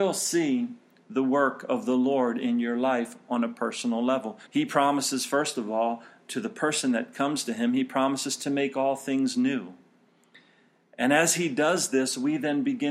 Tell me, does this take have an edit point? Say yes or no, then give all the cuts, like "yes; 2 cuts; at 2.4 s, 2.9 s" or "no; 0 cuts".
yes; 1 cut; at 4.5 s